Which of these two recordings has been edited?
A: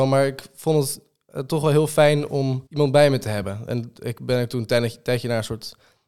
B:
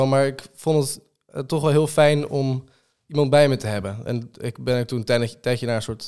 A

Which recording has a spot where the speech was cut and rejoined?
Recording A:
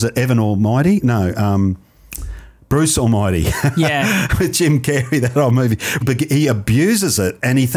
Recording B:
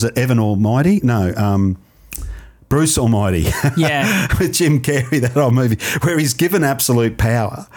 A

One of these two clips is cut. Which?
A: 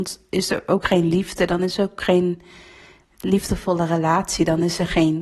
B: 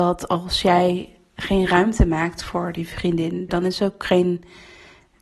B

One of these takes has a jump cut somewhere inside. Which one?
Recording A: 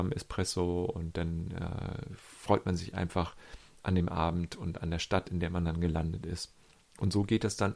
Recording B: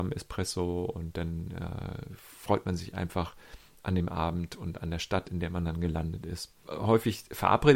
B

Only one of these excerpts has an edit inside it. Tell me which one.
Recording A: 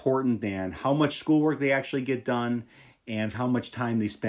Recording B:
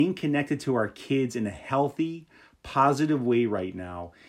A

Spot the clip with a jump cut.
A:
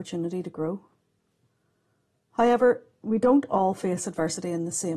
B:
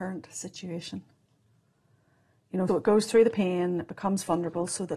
B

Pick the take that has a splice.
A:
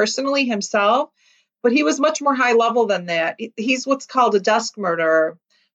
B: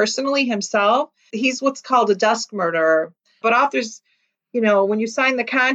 B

